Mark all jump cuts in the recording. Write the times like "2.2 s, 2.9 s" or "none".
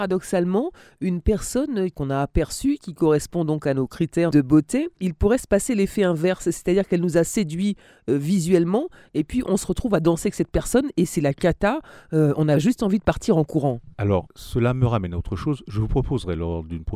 13.9 s